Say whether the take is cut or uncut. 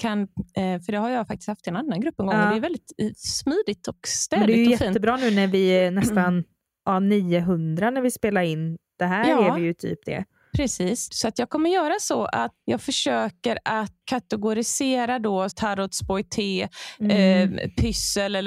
cut